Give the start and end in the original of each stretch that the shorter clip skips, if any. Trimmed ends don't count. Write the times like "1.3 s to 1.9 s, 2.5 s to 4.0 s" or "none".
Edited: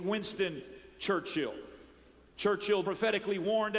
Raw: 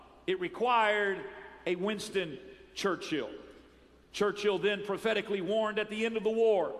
4.6 s to 4.9 s